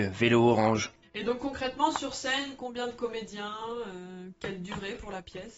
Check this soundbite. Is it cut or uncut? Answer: cut